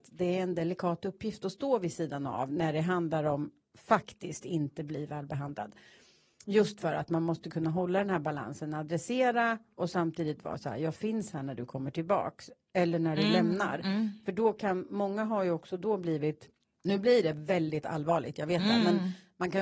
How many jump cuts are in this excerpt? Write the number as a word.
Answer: zero